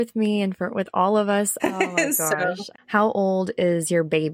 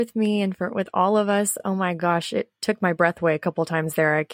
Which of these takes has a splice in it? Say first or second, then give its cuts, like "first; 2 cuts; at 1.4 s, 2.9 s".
first; 2 cuts; at 1.6 s, 2.7 s